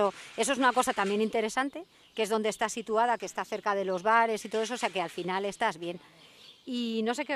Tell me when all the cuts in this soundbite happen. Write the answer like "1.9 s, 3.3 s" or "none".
none